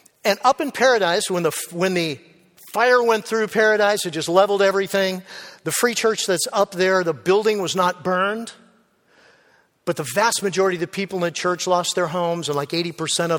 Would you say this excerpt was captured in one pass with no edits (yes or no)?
yes